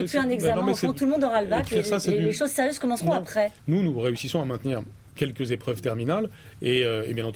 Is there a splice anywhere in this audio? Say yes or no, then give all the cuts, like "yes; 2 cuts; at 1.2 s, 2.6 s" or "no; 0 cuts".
yes; 1 cut; at 3.6 s